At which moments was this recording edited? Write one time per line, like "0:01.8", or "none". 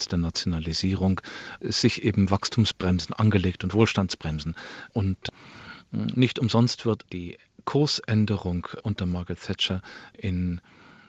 0:01.6
0:07.0